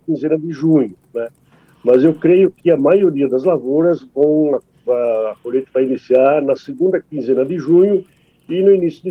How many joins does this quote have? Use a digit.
0